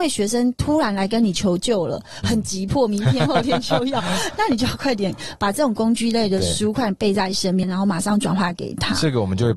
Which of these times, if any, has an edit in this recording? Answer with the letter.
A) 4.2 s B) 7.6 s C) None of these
B